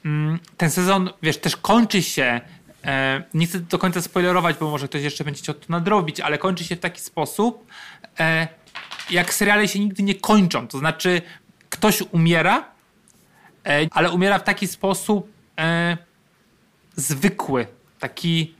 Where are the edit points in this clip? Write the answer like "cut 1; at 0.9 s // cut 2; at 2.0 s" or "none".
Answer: cut 1; at 13.8 s